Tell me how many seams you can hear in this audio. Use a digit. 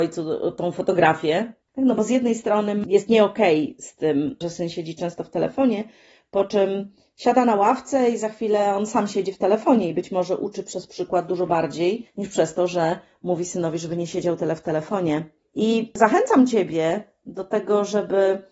2